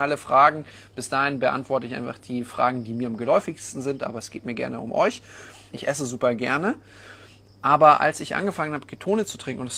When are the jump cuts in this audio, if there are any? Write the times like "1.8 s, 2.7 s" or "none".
5.7 s